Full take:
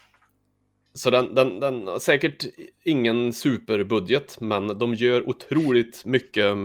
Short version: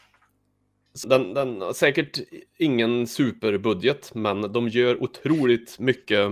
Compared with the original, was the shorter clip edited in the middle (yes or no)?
yes